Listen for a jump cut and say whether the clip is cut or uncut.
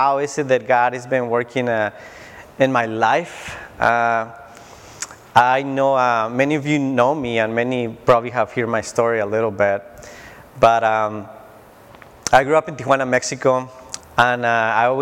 cut